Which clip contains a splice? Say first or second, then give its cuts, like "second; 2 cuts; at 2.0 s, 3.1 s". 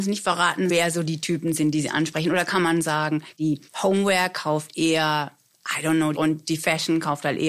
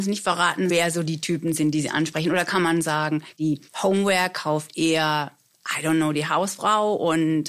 first; 1 cut; at 6.1 s